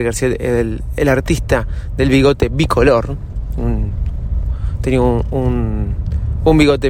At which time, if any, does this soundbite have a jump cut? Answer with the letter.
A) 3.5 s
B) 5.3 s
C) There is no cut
C